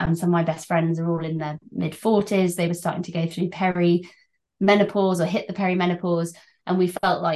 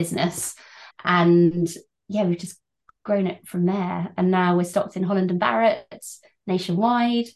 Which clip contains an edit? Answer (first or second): second